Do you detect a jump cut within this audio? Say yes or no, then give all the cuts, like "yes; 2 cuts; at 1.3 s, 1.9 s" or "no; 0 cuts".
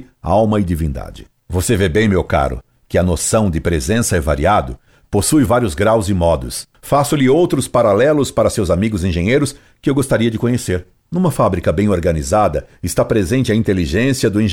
no; 0 cuts